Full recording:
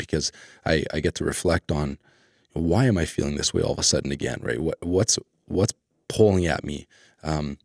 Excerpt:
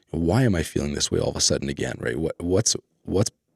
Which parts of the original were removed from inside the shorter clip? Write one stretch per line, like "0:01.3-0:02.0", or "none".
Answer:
none